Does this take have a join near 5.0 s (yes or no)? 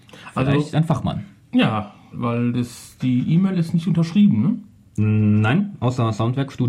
no